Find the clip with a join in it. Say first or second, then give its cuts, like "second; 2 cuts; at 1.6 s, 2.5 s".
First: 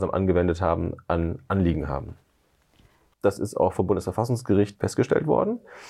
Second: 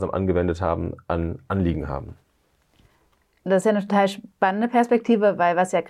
first; 2 cuts; at 3.1 s, 4.7 s